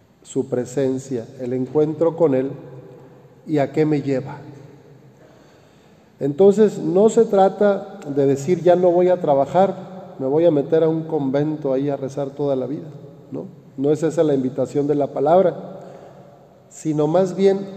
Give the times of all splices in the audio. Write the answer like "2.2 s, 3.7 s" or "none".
none